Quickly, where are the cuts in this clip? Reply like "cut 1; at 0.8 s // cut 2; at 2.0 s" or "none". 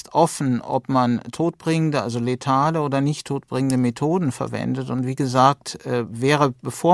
none